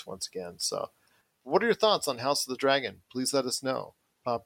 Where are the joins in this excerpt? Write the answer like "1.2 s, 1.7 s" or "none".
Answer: none